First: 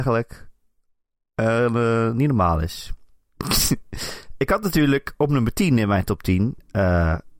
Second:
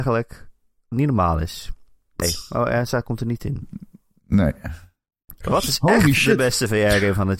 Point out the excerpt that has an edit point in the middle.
second; 3 cuts; at 0.9 s, 2.2 s, 5.4 s

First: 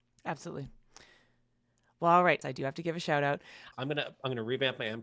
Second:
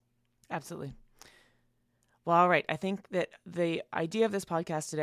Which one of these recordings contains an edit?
first; 2 cuts; at 2.4 s, 3.7 s

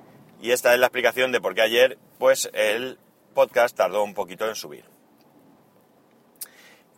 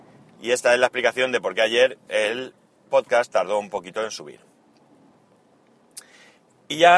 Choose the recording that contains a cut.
second; 1 cut; at 2.1 s

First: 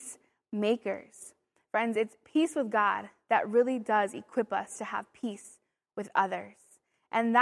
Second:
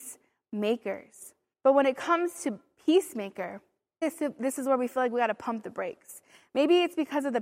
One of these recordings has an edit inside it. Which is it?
second; 2 cuts; at 1.5 s, 4.0 s

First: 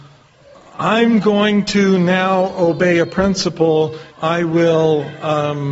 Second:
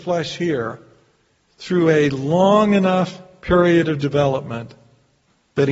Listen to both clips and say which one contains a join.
first; 1 cut; at 4.1 s

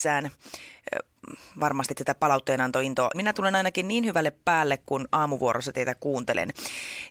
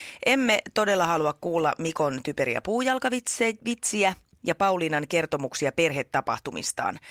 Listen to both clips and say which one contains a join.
first; 1 cut; at 3.1 s

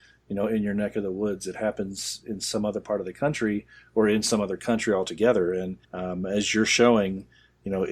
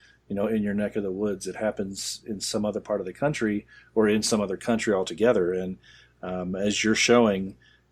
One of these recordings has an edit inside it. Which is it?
first; 1 cut; at 5.8 s

